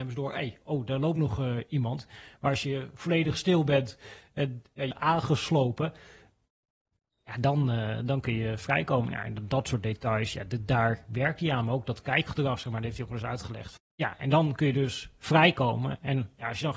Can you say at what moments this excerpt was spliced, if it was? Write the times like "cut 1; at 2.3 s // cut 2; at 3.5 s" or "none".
cut 1; at 4.9 s // cut 2; at 13.8 s